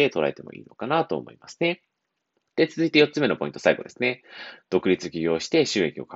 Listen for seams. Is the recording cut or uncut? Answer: cut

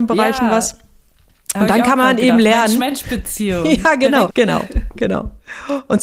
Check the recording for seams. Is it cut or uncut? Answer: cut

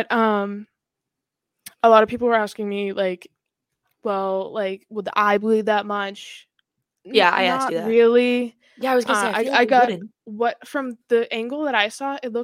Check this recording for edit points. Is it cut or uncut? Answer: cut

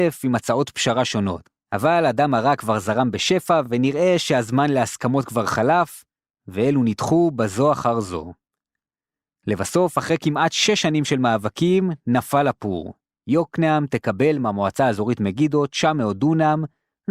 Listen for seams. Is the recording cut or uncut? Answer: uncut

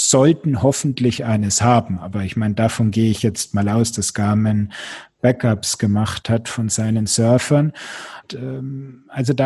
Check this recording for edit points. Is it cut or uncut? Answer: cut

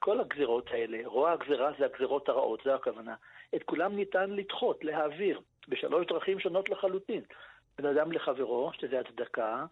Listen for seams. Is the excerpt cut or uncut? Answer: uncut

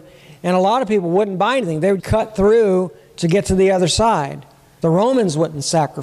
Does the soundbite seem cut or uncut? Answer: cut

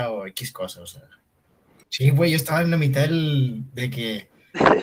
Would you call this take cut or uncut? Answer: cut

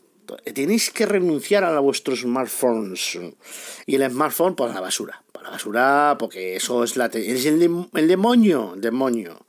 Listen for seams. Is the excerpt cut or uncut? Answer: cut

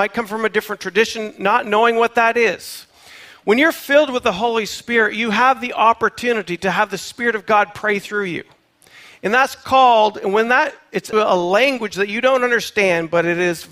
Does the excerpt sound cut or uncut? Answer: cut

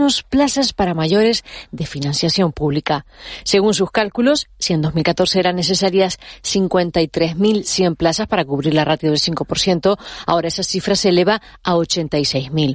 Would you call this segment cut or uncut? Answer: uncut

